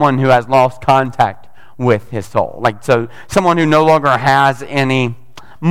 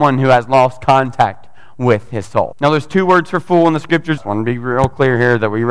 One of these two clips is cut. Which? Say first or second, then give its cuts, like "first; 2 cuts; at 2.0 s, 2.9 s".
second; 2 cuts; at 2.5 s, 4.2 s